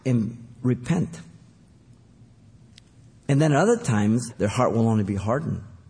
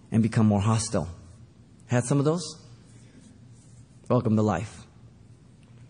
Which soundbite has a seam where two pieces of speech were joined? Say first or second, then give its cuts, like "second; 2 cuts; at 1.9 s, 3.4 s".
first; 1 cut; at 4.3 s